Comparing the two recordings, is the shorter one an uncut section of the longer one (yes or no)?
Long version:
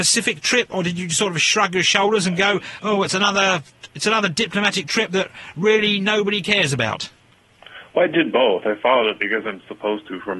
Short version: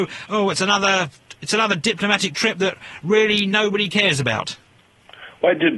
yes